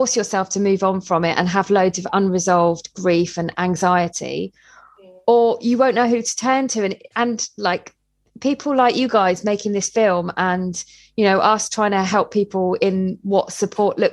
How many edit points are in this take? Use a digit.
1